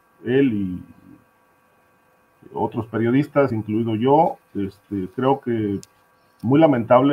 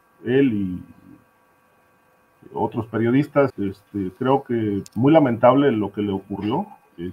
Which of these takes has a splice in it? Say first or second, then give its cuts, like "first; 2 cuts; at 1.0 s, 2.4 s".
second; 2 cuts; at 3.5 s, 4.9 s